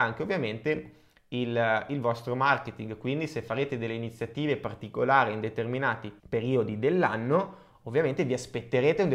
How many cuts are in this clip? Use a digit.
1